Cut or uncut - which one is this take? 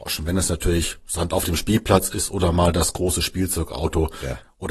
uncut